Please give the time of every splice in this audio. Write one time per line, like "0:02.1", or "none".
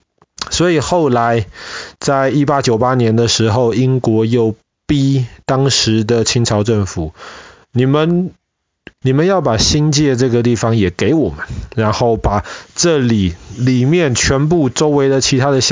0:09.0

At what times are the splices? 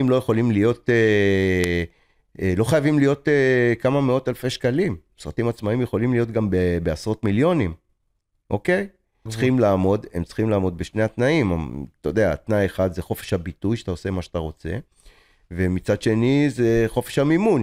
0:09.3

